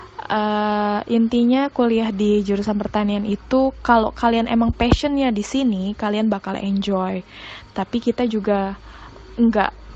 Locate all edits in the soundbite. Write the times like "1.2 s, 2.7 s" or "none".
none

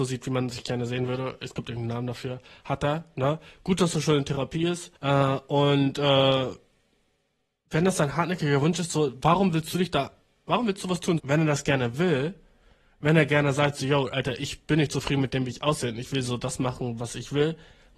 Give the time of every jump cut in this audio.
5.0 s, 11.2 s

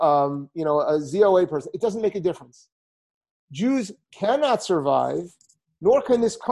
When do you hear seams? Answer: none

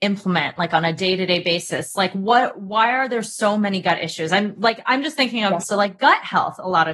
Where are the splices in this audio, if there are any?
5.6 s

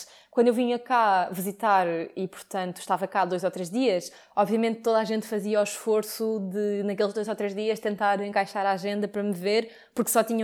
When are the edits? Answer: none

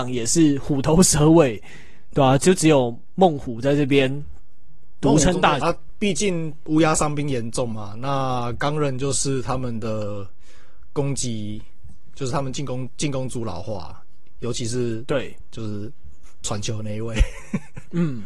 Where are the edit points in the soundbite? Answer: 5.6 s

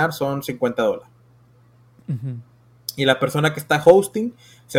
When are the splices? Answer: none

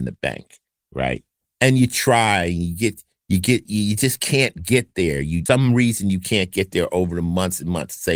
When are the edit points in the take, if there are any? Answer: 3.7 s, 5.5 s

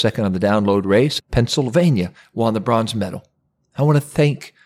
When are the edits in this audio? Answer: 1.2 s, 3.7 s

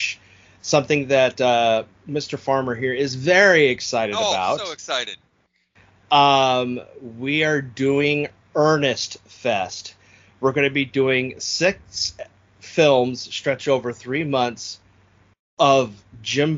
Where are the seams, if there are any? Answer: none

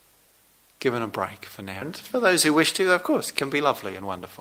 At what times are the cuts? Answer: 1.8 s

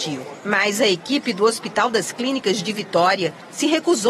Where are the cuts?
none

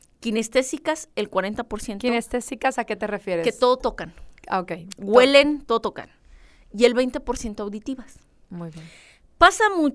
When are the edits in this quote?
none

